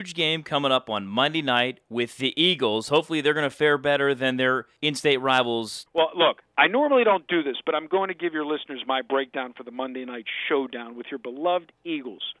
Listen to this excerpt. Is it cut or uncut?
uncut